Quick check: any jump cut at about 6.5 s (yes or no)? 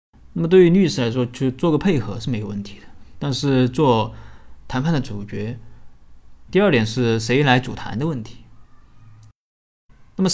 yes